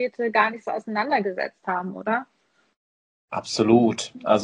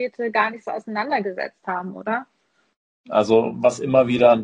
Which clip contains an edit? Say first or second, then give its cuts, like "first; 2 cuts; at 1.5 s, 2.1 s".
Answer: second; 1 cut; at 3.0 s